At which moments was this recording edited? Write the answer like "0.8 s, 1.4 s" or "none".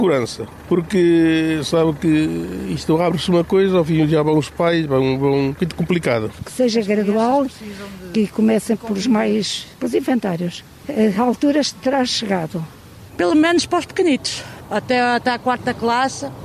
13.1 s